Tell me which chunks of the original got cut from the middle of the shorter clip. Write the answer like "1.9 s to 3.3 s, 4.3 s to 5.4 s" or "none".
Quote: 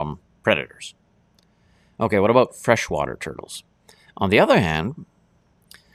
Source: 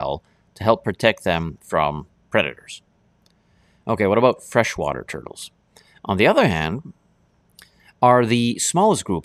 none